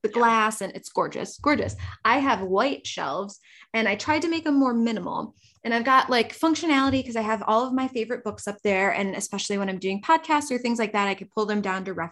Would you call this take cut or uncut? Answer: uncut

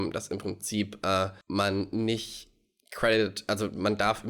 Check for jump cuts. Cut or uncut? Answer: cut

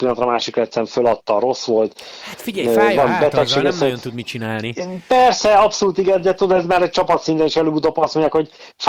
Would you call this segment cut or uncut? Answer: uncut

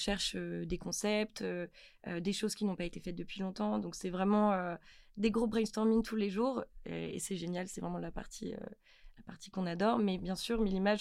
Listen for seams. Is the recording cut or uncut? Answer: uncut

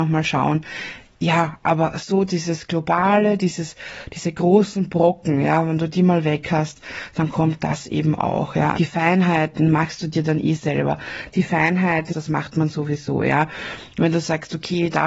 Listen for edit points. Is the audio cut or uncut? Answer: cut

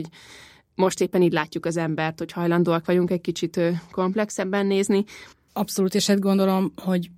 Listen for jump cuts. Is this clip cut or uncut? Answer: cut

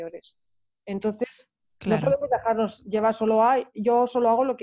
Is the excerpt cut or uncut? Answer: uncut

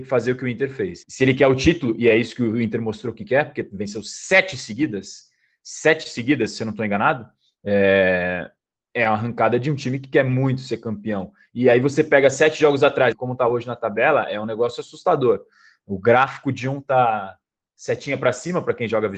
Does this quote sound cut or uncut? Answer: cut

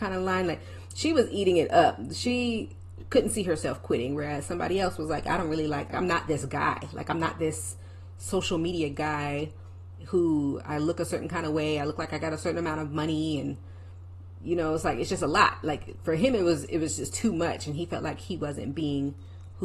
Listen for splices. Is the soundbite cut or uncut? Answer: cut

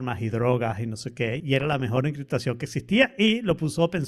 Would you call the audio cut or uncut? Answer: cut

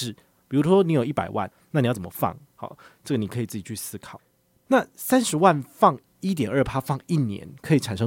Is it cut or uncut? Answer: cut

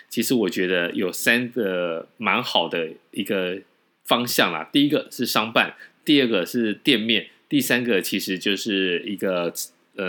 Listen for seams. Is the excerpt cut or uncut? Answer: uncut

